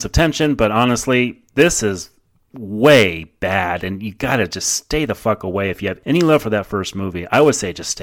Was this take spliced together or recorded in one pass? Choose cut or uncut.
uncut